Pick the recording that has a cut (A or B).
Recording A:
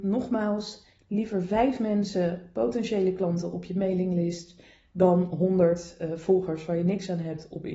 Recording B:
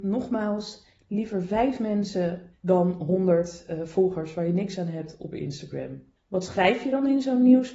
B